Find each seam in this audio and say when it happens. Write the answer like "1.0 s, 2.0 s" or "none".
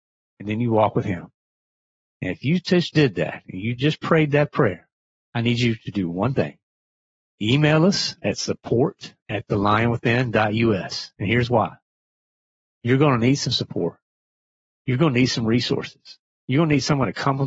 none